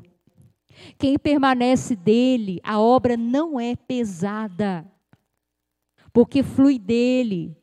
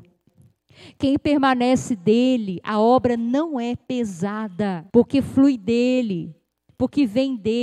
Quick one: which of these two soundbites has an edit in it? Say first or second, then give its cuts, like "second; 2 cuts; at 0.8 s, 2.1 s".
second; 1 cut; at 4.9 s